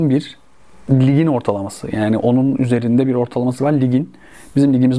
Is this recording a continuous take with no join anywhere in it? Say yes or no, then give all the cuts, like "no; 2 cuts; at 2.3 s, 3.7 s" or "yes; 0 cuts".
yes; 0 cuts